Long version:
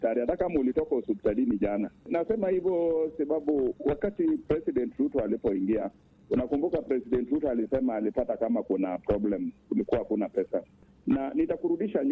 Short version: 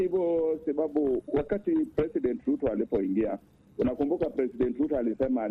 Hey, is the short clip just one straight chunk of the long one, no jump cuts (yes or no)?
yes